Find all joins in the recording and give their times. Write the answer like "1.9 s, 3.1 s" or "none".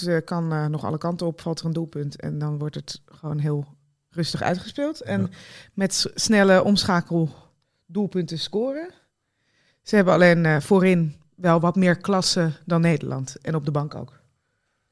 none

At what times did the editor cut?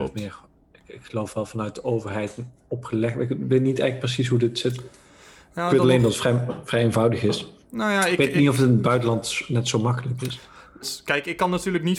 10.8 s

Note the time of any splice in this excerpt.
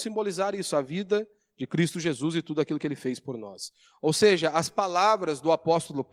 none

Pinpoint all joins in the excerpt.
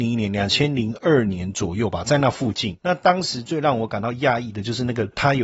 none

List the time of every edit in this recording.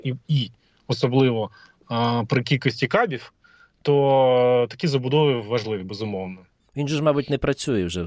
6.6 s

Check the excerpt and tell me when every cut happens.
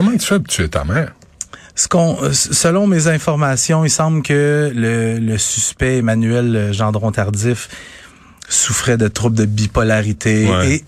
none

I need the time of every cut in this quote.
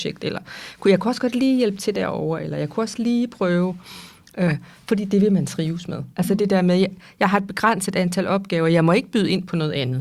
6.1 s

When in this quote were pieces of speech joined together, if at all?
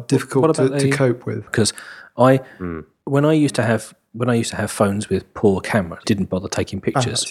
1.5 s, 6.0 s

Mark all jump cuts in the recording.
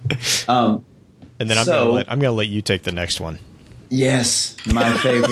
none

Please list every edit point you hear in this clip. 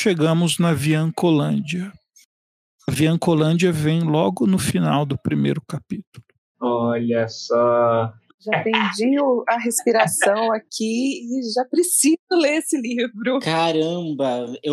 none

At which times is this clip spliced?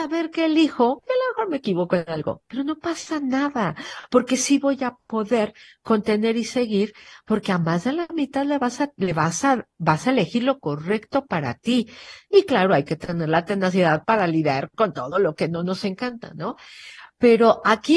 none

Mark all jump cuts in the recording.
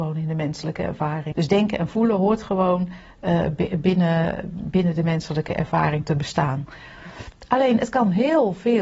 1.3 s

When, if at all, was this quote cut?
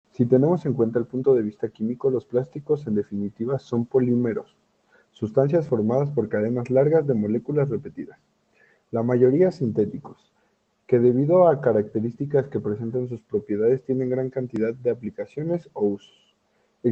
none

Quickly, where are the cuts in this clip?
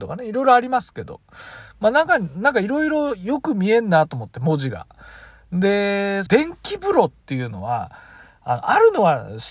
6.3 s

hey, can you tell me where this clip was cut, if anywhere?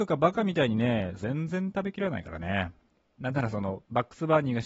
1.2 s

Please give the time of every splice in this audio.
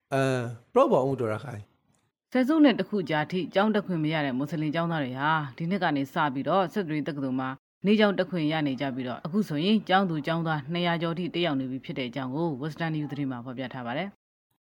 none

